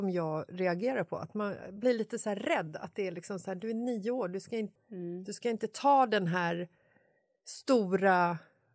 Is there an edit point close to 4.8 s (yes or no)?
yes